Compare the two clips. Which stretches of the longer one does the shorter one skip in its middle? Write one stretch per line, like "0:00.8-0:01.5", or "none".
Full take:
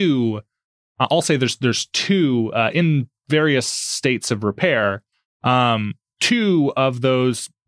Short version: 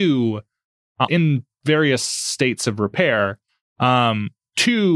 0:01.1-0:02.7